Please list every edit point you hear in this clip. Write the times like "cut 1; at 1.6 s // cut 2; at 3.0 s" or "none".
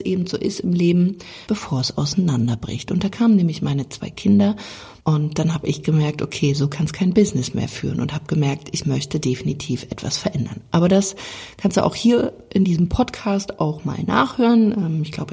cut 1; at 1.5 s // cut 2; at 5.0 s